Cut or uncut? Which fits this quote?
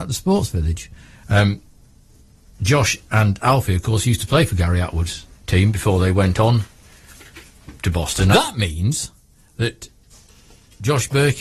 cut